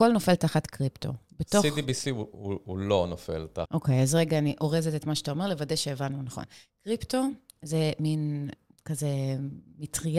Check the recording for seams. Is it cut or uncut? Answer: cut